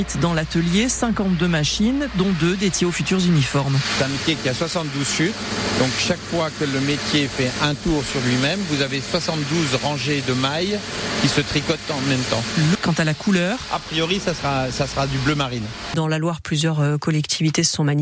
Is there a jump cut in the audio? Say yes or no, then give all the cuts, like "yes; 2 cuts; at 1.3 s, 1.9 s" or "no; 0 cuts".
yes; 2 cuts; at 12.7 s, 15.9 s